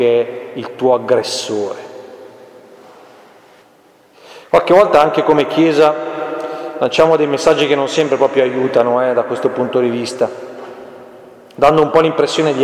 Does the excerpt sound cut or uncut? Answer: uncut